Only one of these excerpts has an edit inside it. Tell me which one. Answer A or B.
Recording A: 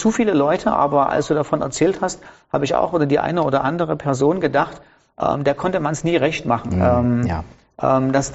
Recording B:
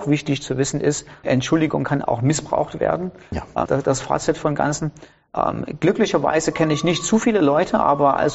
B